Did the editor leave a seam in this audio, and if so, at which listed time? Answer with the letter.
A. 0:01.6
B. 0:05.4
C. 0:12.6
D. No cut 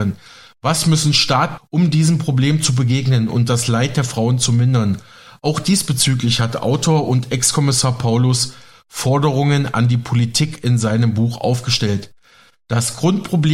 A